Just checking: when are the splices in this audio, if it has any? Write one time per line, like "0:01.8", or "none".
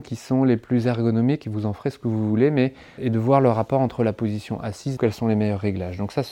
0:03.0
0:05.0